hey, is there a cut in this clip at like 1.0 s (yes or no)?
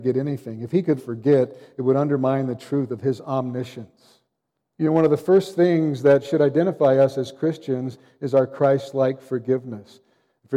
yes